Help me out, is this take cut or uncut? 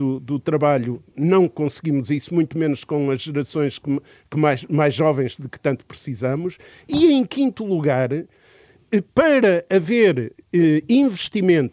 uncut